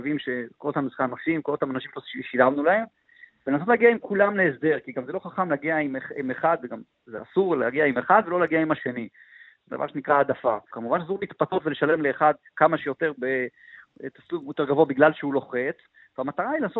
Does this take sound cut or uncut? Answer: cut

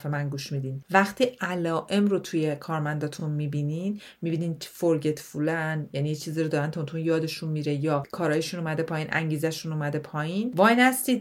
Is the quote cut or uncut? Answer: uncut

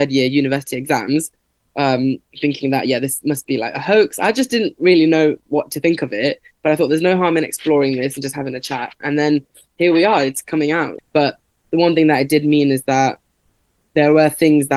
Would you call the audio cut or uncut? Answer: cut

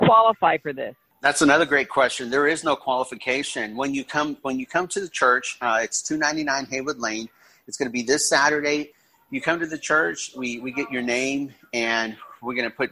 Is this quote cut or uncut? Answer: uncut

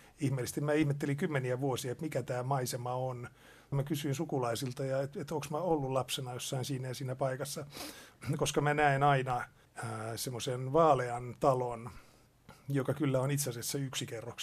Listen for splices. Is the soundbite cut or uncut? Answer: uncut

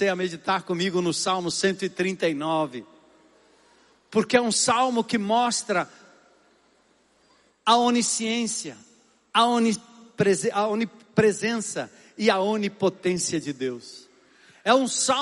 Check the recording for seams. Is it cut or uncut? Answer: uncut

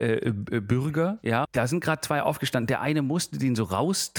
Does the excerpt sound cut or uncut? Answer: cut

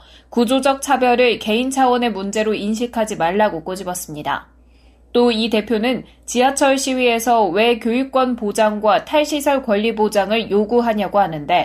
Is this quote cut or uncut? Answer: uncut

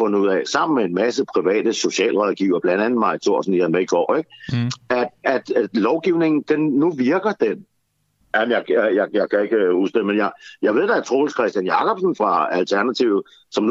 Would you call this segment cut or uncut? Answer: cut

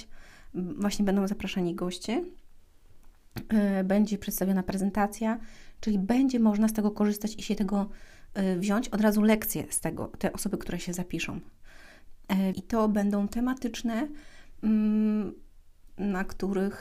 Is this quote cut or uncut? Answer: cut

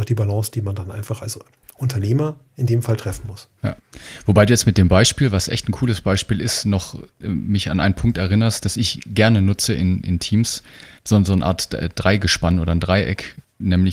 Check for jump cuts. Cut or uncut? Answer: cut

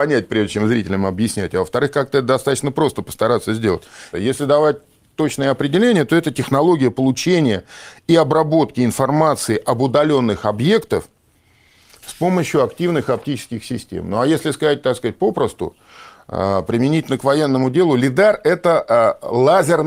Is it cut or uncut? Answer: cut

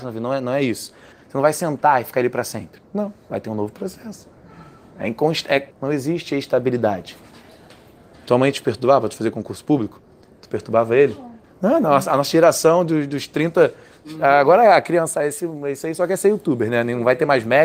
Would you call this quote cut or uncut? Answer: cut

